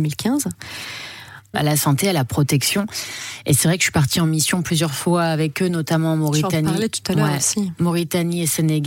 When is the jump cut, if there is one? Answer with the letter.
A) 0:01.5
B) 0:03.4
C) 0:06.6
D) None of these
A